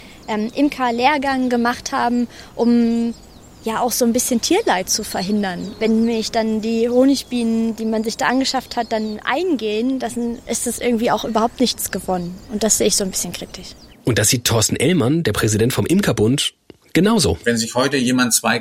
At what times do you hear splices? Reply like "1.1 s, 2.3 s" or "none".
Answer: none